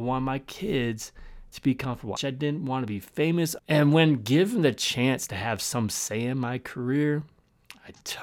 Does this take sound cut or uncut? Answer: cut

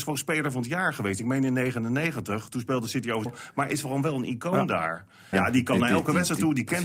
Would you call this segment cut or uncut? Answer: cut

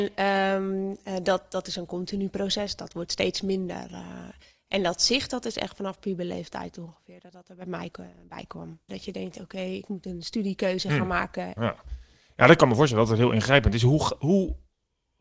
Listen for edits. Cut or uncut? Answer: cut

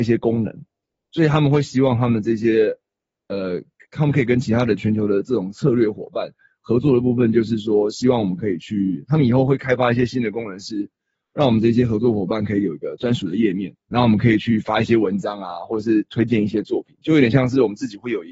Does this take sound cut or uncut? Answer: cut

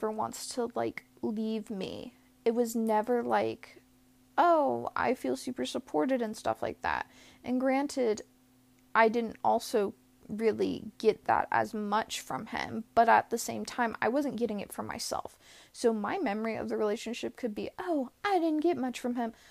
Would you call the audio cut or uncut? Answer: uncut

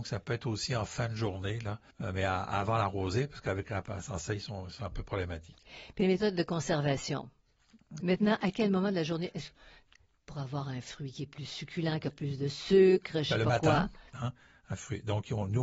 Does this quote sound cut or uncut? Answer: cut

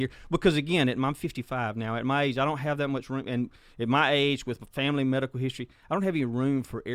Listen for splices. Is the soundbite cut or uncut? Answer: uncut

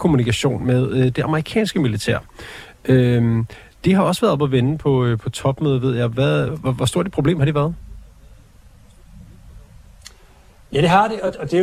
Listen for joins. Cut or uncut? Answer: uncut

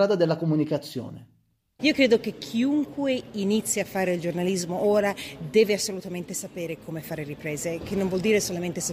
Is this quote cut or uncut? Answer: cut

